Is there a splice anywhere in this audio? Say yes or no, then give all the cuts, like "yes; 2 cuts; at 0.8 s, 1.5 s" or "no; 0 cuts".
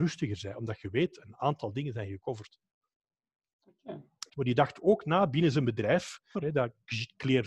yes; 2 cuts; at 4.3 s, 6.3 s